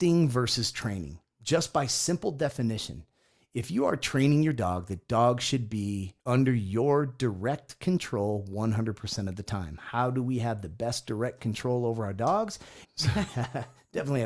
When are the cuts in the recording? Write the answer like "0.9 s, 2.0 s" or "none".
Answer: 6.2 s, 12.8 s